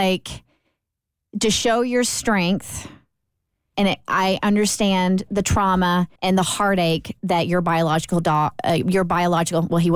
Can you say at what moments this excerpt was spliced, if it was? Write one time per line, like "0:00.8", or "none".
0:03.7
0:06.2